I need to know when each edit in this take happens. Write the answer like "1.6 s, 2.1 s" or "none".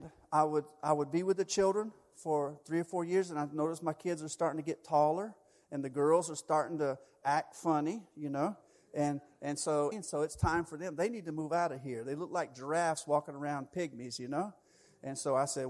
9.9 s